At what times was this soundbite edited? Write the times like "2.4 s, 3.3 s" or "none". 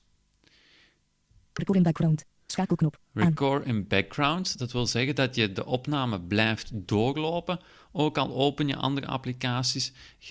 none